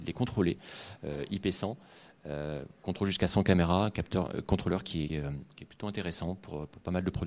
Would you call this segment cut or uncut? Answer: cut